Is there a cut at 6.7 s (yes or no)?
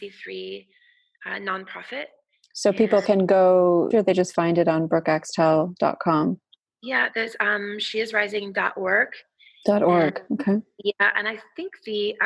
no